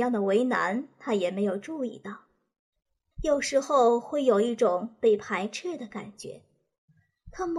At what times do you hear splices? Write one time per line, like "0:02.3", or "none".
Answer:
0:03.1